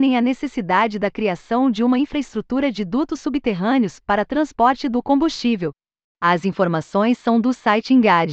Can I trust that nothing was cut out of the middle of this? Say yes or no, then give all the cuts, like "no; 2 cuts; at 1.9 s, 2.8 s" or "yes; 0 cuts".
yes; 0 cuts